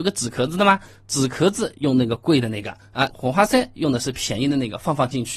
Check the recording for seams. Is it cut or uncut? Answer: cut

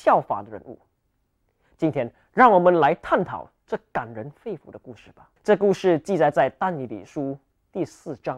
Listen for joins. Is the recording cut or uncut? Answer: cut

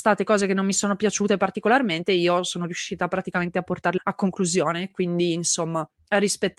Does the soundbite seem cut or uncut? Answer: uncut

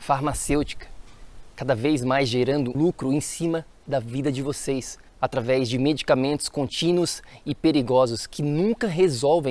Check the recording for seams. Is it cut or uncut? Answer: cut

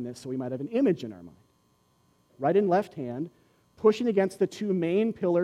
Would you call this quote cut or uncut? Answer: cut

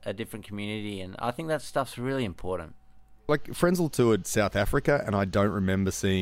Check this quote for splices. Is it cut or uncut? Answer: uncut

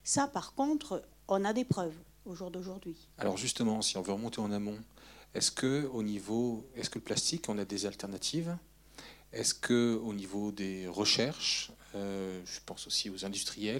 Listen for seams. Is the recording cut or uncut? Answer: cut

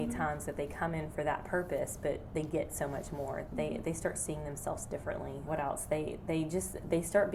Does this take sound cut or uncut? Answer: cut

